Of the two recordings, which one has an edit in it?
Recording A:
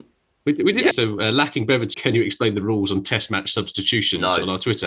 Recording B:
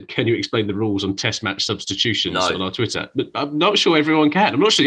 A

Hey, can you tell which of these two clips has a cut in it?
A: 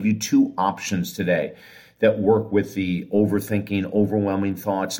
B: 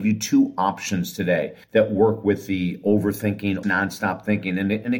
B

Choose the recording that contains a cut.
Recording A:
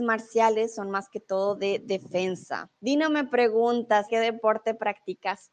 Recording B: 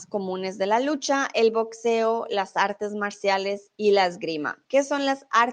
A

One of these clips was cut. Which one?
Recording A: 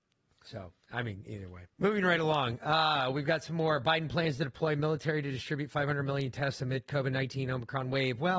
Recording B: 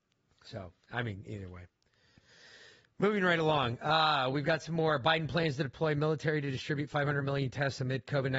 A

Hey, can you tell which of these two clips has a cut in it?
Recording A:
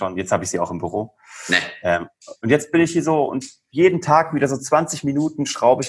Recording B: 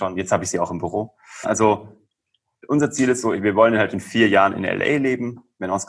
B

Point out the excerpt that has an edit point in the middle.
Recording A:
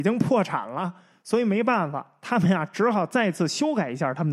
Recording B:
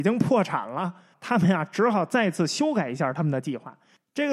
B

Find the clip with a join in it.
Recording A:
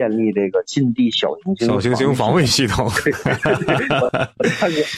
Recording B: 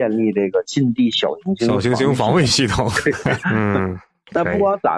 B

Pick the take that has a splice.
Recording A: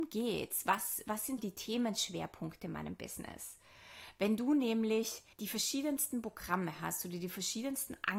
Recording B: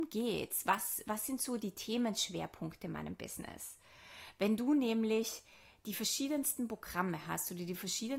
A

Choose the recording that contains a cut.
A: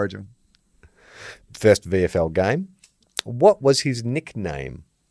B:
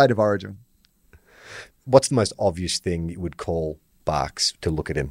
B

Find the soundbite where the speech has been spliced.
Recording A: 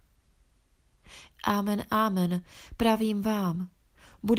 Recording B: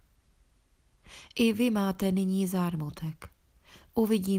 A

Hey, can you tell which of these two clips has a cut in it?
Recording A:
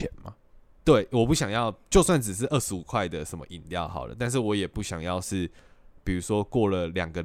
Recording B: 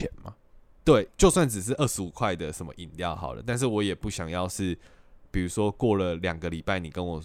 B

